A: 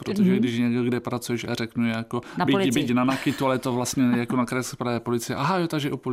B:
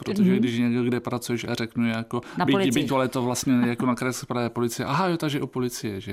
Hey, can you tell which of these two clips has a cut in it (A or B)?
B